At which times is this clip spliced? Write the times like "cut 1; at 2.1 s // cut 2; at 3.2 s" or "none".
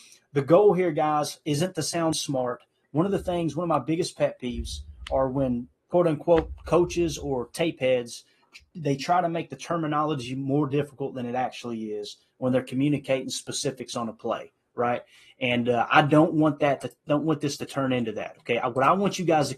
none